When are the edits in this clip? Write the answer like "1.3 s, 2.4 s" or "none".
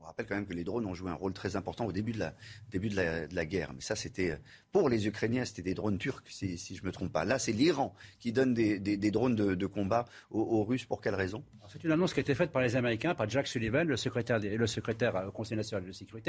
none